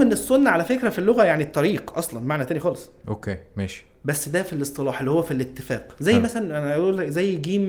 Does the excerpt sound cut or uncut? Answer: uncut